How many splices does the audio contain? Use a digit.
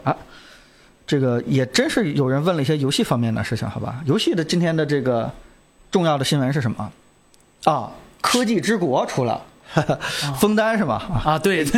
0